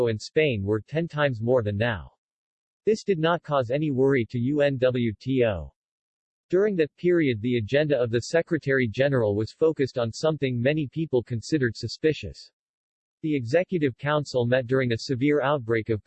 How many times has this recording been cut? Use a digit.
0